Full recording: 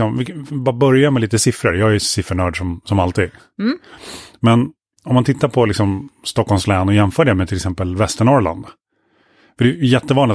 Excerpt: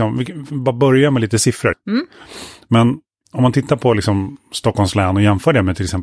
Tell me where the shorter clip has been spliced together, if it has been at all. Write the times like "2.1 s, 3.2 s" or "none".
1.7 s

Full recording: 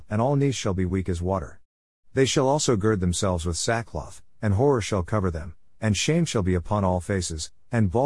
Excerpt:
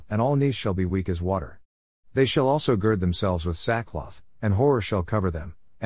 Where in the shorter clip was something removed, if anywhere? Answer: none

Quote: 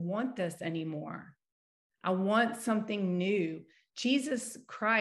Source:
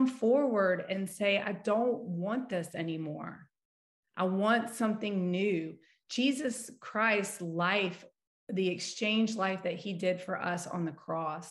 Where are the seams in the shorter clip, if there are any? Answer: none

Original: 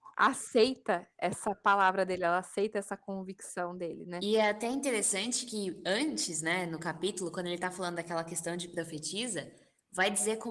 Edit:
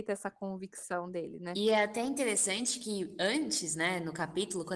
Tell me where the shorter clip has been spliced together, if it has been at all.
none

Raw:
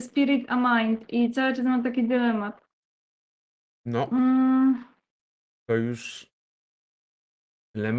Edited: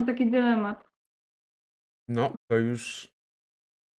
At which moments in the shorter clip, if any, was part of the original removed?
2.3 s

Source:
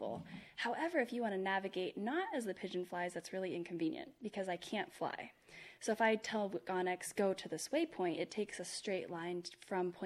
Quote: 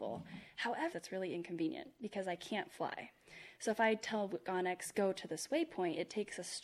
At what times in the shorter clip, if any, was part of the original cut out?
0.9 s

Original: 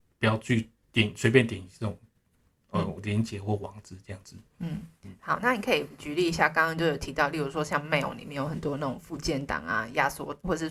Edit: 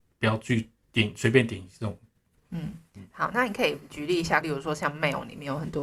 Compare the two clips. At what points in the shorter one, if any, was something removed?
2.4 s, 4.4 s

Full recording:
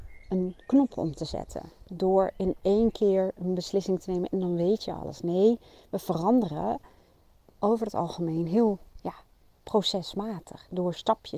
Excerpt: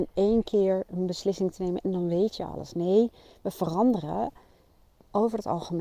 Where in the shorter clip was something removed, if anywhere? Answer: none

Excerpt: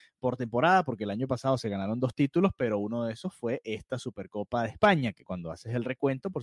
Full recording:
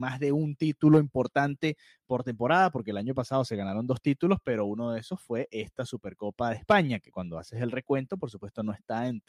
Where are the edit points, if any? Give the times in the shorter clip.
none

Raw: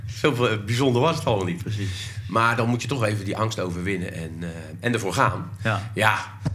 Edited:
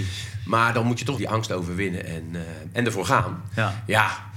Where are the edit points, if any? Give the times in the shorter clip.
1.1 s

